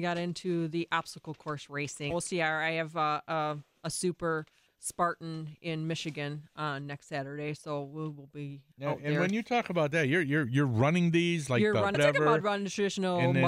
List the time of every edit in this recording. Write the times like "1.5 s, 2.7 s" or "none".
2.1 s, 11.9 s